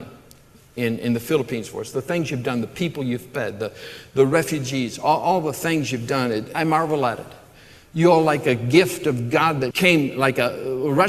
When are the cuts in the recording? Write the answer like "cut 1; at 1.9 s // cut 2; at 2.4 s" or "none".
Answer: cut 1; at 6.5 s // cut 2; at 9.7 s